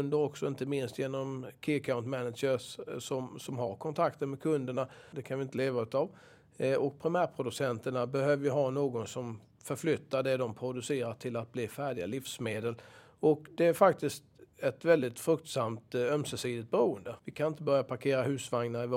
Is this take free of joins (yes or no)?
no